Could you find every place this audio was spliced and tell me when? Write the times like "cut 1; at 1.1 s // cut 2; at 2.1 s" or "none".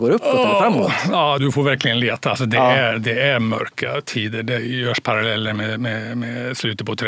cut 1; at 1.4 s